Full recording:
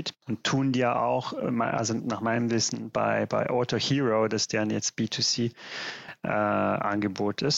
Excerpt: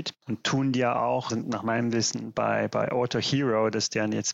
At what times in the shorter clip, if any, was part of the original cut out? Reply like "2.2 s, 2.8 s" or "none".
1.3 s